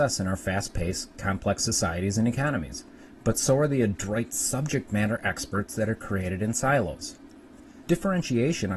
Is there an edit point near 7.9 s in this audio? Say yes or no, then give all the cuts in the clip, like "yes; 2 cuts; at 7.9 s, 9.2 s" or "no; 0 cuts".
yes; 1 cut; at 7.9 s